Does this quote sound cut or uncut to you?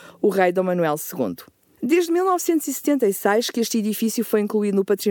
uncut